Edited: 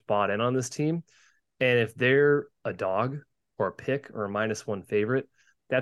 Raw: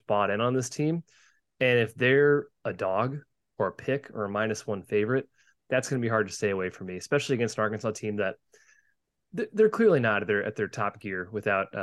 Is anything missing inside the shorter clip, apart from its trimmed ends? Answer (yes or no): no